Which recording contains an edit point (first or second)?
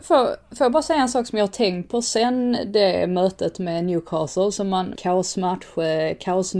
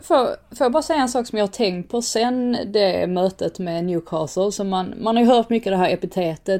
first